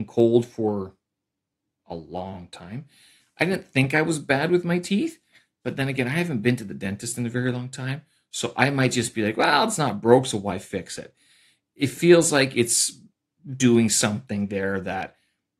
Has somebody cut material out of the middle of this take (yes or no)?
no